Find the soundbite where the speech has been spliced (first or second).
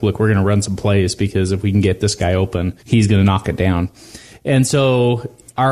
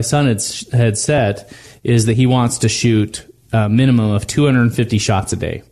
first